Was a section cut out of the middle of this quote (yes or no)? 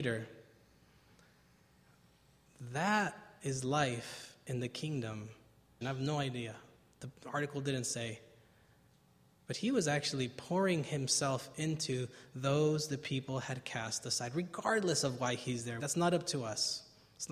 yes